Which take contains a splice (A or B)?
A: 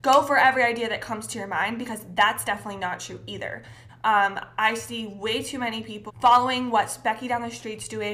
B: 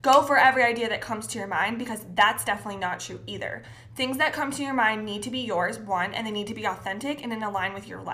A